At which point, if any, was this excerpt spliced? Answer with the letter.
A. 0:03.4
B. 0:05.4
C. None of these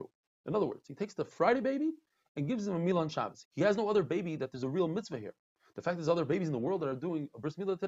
A